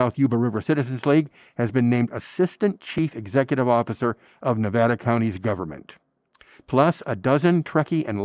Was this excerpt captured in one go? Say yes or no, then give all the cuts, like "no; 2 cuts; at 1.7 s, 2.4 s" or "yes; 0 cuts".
yes; 0 cuts